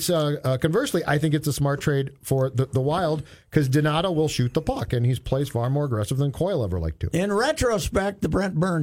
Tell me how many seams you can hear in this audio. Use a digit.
0